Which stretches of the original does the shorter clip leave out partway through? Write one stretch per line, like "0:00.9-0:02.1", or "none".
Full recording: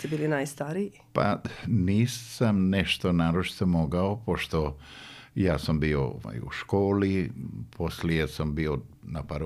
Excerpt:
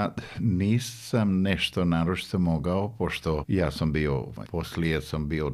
0:04.7-0:05.3
0:06.3-0:07.7